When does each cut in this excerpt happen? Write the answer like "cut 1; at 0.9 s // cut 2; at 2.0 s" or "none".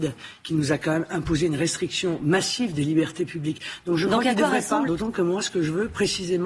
cut 1; at 4.8 s